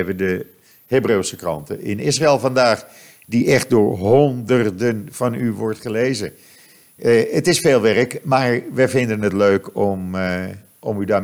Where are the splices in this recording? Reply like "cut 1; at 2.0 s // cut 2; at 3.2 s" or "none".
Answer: none